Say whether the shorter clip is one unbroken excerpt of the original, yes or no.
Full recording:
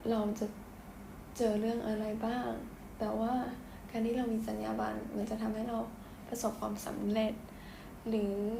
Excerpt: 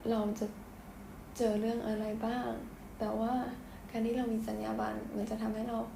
yes